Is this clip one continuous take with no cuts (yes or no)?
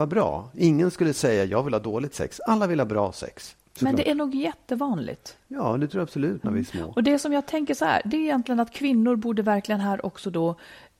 no